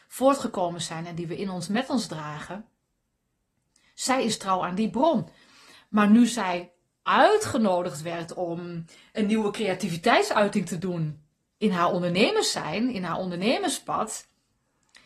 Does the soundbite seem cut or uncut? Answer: uncut